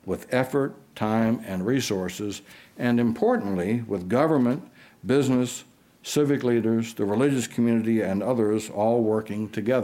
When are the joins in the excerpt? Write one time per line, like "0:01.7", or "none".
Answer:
none